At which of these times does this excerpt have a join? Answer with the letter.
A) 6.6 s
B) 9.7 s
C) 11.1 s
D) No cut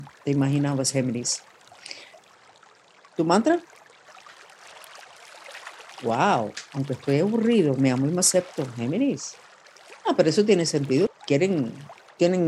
C